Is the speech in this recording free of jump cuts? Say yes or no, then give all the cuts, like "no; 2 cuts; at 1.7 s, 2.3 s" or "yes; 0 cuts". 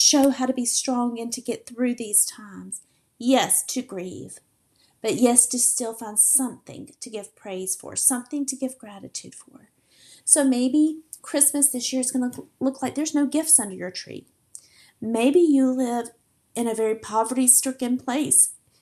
yes; 0 cuts